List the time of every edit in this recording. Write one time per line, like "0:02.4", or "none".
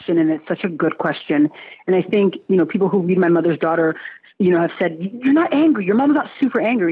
none